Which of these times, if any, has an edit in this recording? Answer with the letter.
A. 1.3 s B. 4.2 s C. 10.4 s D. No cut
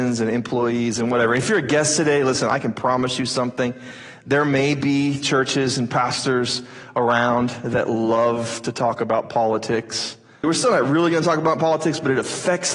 C